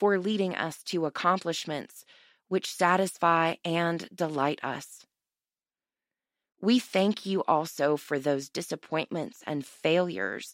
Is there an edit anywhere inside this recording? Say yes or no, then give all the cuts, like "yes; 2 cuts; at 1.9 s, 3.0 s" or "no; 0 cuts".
no; 0 cuts